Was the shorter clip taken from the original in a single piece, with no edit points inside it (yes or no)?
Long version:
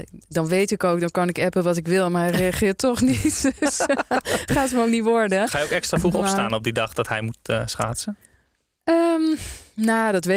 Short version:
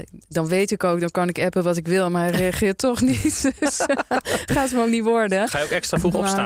yes